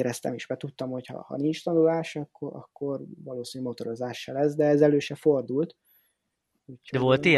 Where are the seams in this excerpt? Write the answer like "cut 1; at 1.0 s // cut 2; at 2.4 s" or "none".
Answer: none